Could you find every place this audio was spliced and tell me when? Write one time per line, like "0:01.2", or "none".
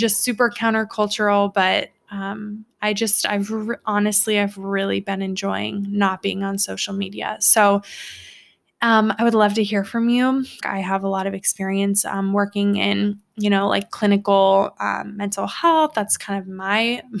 0:10.6